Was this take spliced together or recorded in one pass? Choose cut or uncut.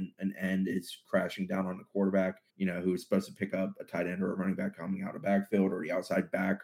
cut